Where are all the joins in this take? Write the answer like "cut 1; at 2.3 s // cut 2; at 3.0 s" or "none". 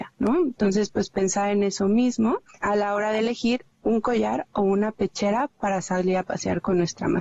none